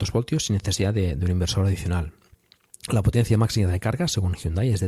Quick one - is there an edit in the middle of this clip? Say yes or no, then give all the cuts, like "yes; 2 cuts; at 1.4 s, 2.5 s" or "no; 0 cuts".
no; 0 cuts